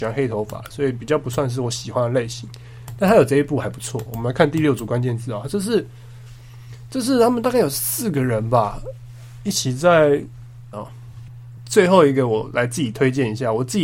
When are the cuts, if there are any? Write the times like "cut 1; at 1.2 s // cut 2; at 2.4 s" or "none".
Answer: cut 1; at 10.7 s

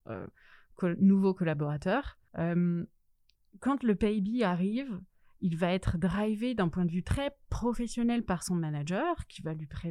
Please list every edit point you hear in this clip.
cut 1; at 2.3 s

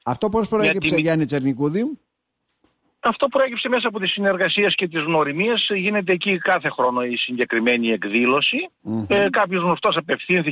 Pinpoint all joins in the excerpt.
cut 1; at 8.8 s

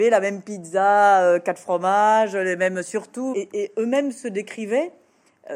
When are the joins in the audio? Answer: cut 1; at 3.3 s

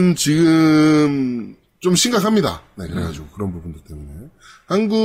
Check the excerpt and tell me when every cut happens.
none

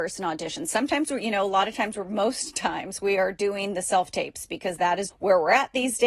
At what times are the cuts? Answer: cut 1; at 5.1 s

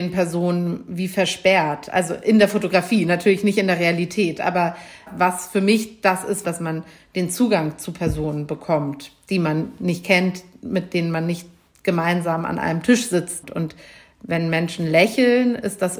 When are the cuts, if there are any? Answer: cut 1; at 6.4 s

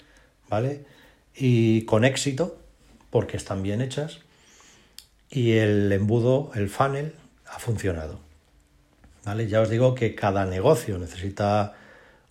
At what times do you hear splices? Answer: none

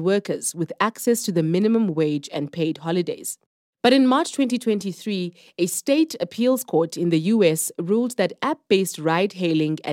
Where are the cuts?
none

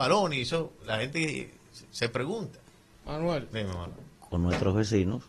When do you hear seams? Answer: cut 1; at 2.9 s // cut 2; at 4.2 s

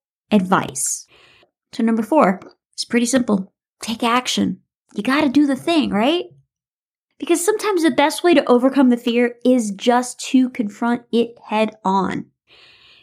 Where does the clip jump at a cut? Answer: none

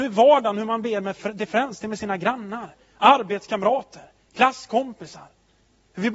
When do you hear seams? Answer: none

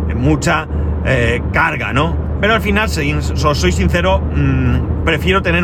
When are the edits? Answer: none

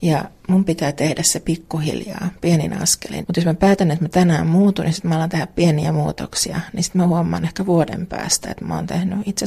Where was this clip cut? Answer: cut 1; at 3.2 s

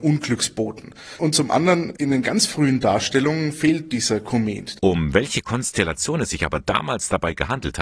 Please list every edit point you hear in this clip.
cut 1; at 4.8 s

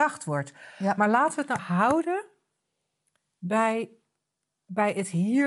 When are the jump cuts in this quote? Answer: cut 1; at 1.6 s

